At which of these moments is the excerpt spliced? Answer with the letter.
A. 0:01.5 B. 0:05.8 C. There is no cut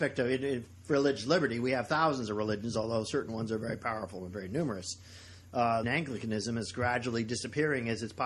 B